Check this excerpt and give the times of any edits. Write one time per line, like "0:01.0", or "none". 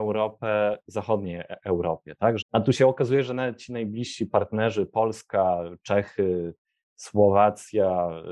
0:02.4

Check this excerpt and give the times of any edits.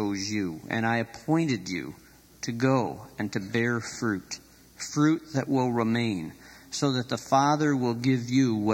none

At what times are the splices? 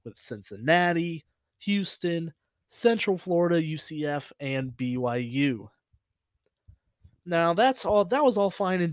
none

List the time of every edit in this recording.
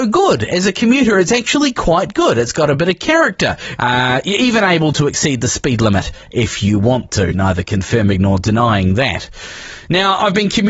0:03.8
0:07.3

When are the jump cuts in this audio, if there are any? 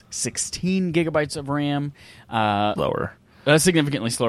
0:02.8

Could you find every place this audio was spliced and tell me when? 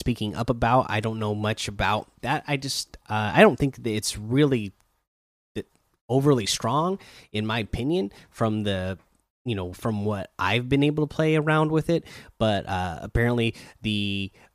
none

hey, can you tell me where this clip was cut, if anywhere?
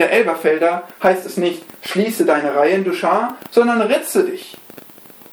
none

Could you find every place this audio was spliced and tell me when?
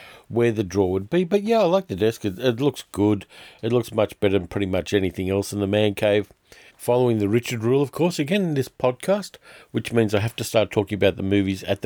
0:06.7

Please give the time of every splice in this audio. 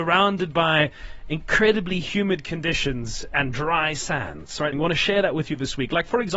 0:04.7

